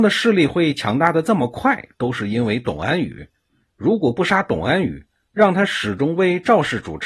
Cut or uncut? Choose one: uncut